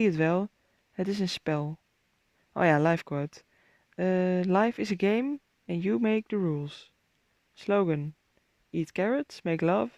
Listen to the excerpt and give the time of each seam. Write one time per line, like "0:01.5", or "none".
none